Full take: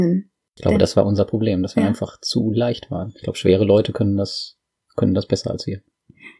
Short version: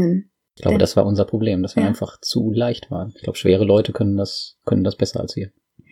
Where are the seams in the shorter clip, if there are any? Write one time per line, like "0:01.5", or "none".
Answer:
0:04.6